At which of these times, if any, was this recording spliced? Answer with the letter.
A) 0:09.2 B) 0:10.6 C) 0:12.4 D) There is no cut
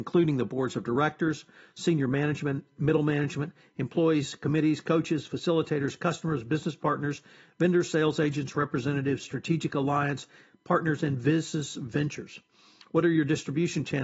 D